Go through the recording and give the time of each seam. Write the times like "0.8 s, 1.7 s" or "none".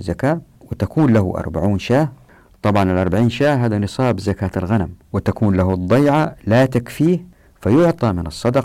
5.0 s